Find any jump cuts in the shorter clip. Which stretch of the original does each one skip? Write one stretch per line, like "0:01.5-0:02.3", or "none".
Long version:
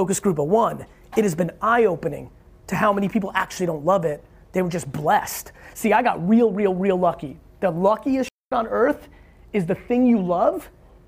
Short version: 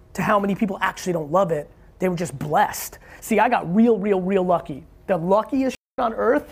none